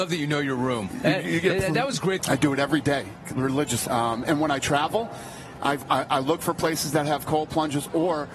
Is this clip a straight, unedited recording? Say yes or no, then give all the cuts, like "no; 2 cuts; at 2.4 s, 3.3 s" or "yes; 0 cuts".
no; 2 cuts; at 2.2 s, 3.9 s